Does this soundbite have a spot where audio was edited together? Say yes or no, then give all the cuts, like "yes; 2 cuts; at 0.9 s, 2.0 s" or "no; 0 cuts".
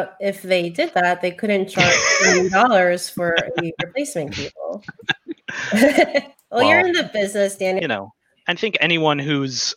yes; 2 cuts; at 6.3 s, 7.8 s